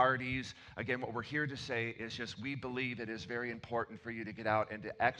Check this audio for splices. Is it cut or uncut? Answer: uncut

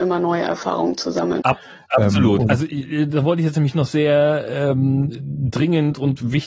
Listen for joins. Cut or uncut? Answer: cut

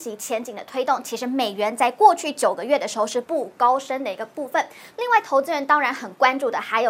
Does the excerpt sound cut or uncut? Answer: cut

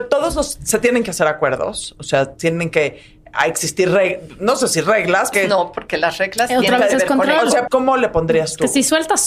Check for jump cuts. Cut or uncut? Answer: cut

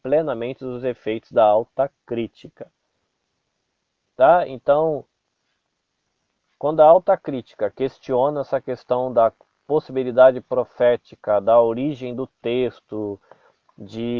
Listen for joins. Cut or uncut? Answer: uncut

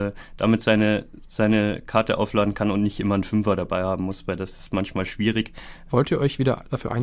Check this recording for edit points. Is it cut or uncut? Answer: cut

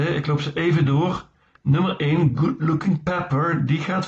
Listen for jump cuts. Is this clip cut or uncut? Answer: uncut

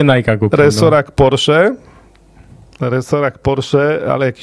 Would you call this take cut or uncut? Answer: uncut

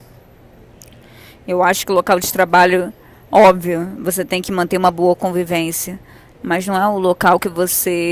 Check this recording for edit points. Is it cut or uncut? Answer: uncut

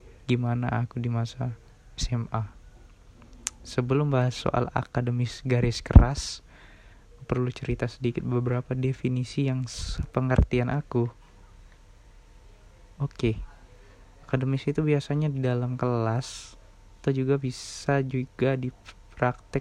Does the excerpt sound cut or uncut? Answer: cut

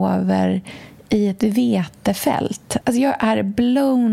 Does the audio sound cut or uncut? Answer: cut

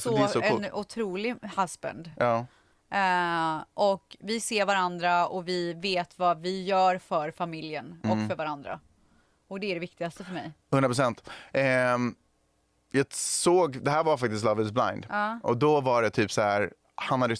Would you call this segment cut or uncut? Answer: uncut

